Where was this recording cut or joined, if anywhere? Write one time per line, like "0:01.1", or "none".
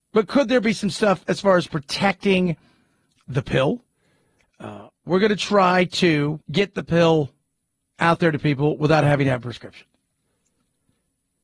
0:04.4
0:06.4